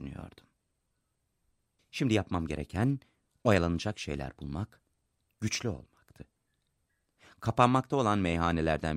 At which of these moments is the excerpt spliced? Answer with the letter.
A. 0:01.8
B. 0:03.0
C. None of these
A